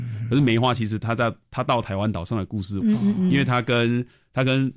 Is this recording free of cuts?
no; 1 cut; at 2.8 s

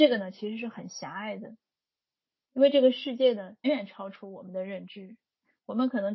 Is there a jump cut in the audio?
yes; 1 cut; at 3.6 s

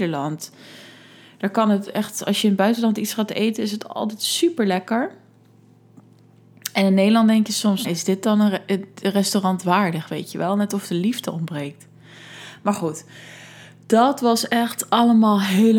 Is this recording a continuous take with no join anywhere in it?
no; 1 cut; at 7.8 s

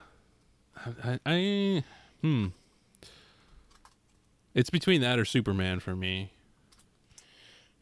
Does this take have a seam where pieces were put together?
no; 0 cuts

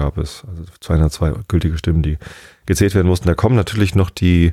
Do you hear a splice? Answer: no; 0 cuts

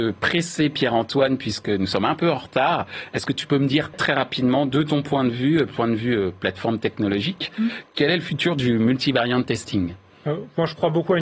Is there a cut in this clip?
yes; 1 cut; at 3.9 s

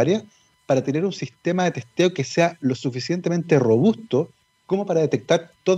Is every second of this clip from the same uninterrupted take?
yes; 0 cuts

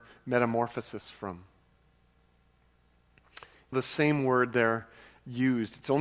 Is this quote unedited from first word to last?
no; 1 cut; at 3.7 s

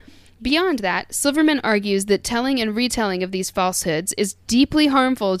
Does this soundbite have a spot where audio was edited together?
no; 0 cuts

